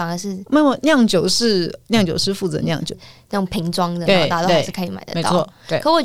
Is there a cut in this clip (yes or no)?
yes